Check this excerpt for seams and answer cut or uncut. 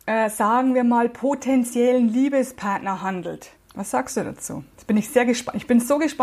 cut